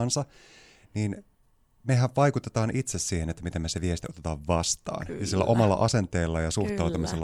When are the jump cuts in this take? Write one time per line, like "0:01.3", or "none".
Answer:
none